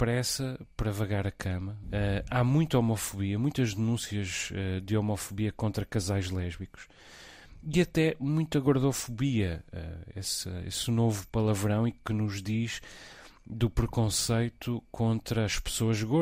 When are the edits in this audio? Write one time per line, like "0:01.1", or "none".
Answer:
0:01.8